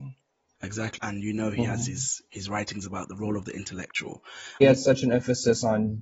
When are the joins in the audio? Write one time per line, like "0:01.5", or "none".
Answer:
0:01.0
0:04.6